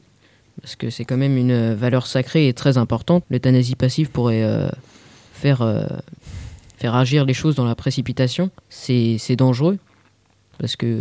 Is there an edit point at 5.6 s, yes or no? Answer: no